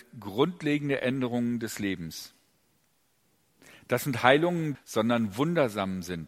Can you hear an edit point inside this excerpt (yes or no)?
yes